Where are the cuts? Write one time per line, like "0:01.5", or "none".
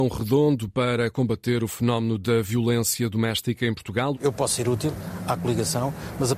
0:04.1